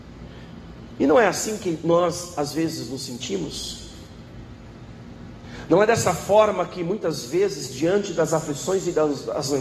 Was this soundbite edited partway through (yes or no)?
yes